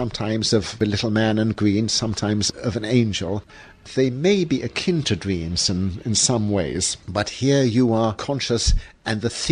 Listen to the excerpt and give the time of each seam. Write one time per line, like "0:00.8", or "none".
none